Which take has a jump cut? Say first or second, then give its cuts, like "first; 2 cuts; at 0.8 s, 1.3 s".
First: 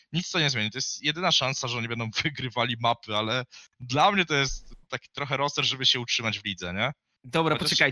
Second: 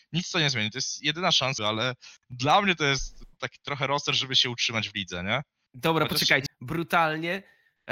second; 2 cuts; at 1.6 s, 6.5 s